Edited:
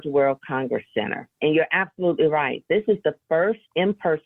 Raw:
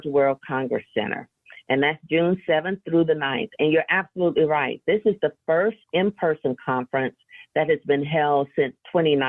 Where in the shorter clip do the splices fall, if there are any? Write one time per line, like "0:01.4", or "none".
0:01.4